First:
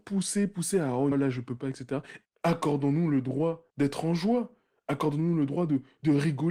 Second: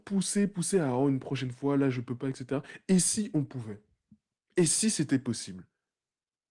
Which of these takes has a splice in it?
first; 3 cuts; at 1.1 s, 2.2 s, 3.7 s

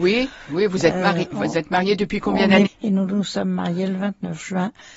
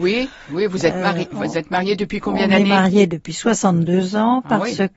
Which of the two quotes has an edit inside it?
first; 1 cut; at 2.7 s

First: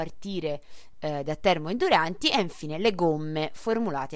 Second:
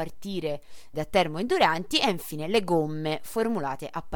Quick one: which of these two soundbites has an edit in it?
second; 1 cut; at 0.9 s

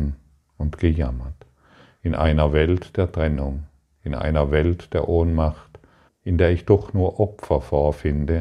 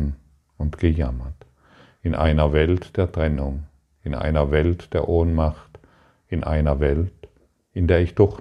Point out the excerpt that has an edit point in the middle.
first; 1 cut; at 6.1 s

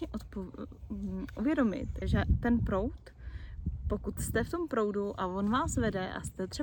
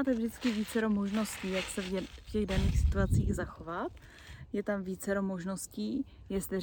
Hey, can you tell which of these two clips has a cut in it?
first; 1 cut; at 2.0 s

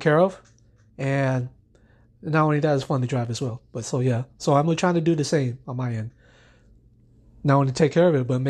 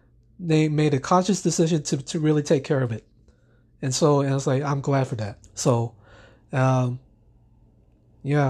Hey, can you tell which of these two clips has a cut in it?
second; 1 cut; at 5.4 s

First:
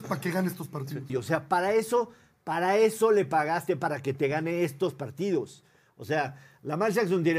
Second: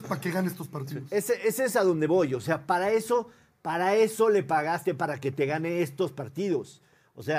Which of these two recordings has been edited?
first; 1 cut; at 1.1 s

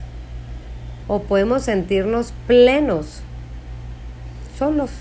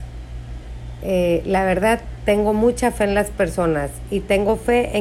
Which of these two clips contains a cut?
first; 1 cut; at 1.0 s

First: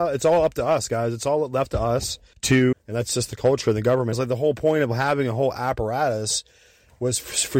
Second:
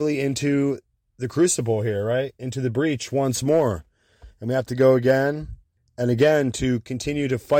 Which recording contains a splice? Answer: first; 2 cuts; at 2.7 s, 4.1 s

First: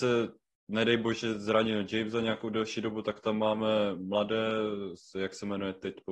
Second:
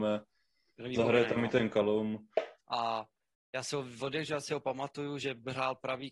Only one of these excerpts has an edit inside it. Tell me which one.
second; 1 cut; at 2.6 s

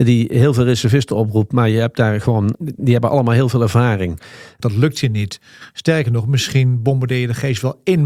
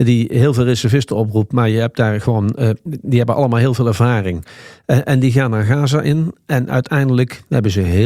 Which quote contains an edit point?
first; 2 cuts; at 2.5 s, 4.6 s

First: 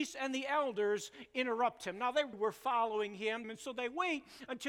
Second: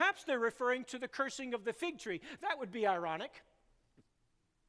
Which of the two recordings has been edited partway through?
first; 2 cuts; at 2.3 s, 3.4 s

